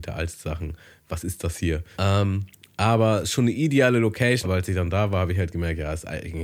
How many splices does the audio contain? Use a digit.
2